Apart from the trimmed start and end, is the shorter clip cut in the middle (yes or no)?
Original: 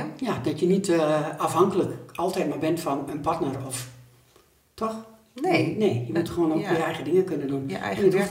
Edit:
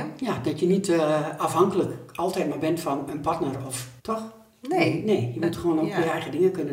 yes